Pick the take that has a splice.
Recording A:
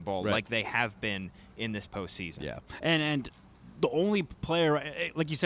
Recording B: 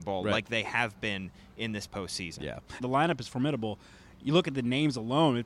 B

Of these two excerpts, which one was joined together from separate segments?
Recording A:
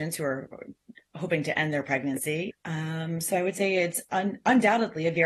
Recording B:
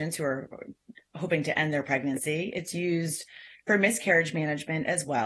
A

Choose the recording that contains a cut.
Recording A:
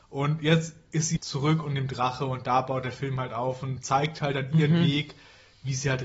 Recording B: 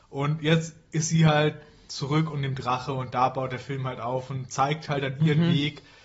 A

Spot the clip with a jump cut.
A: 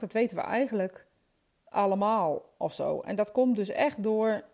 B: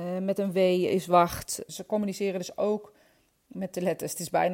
B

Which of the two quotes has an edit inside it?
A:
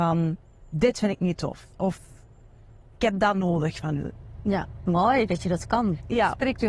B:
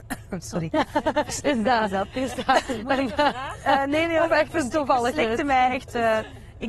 A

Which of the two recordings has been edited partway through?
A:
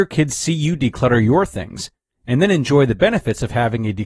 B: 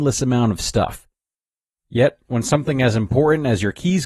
B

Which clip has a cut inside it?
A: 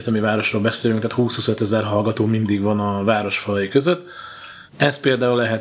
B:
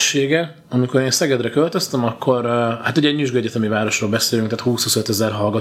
A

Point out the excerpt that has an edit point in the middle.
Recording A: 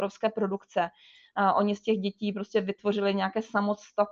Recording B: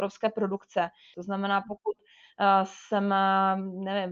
B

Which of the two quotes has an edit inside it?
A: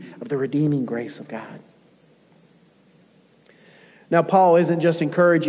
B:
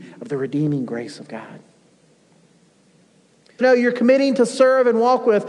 B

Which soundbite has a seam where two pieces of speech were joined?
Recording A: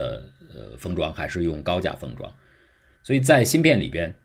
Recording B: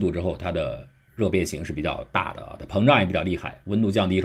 A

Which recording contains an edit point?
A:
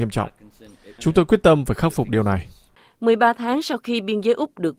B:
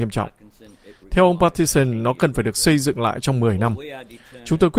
A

